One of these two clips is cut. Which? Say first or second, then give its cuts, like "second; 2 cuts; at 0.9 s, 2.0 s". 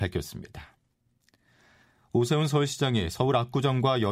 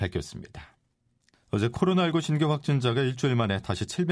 second; 1 cut; at 1.3 s